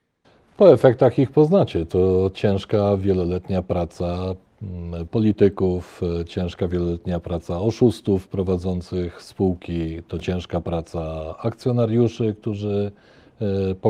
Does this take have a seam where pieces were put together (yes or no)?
no